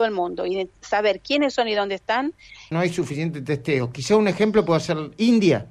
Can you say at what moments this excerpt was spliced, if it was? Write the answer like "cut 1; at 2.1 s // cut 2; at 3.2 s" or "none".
cut 1; at 2.7 s